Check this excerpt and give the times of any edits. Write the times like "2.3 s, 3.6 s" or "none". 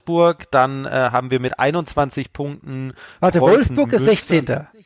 none